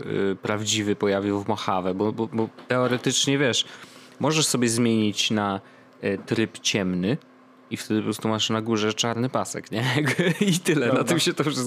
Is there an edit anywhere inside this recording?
no; 0 cuts

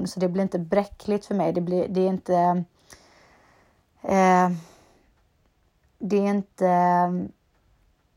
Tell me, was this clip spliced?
no; 0 cuts

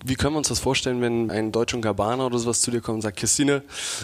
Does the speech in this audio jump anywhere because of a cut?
yes; 1 cut; at 1.3 s

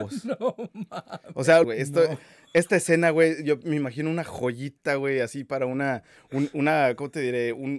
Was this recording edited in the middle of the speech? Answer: yes; 1 cut; at 1.6 s

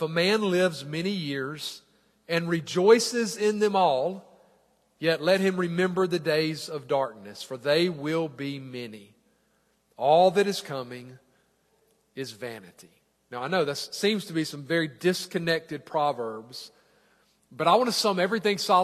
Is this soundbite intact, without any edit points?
yes; 0 cuts

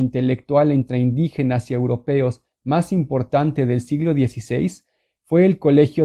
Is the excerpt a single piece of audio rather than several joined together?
yes; 0 cuts

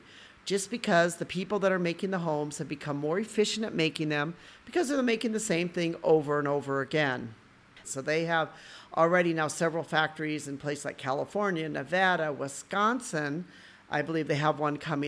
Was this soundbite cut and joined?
yes; 1 cut; at 7.8 s

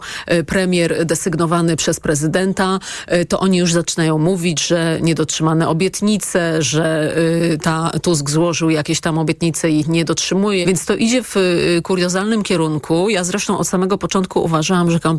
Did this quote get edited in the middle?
yes; 1 cut; at 10.6 s

